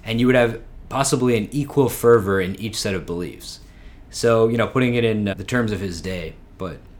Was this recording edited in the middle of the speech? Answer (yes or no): yes